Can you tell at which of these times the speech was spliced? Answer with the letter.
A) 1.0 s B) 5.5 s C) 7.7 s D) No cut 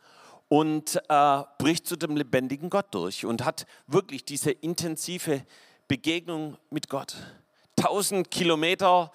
D